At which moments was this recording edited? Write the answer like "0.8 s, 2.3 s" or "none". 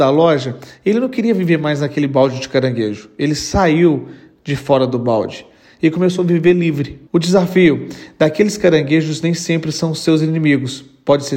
7.1 s